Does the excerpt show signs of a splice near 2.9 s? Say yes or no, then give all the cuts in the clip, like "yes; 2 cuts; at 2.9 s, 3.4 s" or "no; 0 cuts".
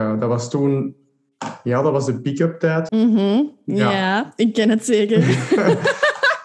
yes; 1 cut; at 2.9 s